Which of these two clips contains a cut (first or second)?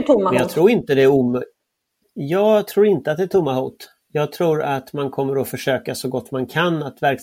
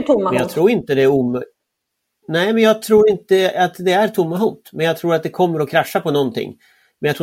first